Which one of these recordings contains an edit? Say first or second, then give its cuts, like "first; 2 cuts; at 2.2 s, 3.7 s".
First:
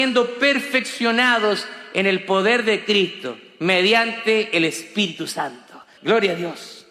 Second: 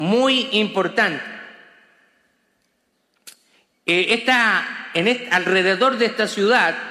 first; 1 cut; at 6.0 s